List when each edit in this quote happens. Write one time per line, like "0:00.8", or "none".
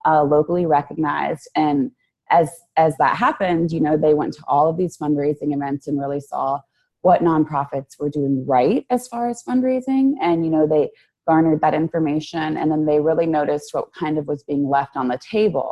none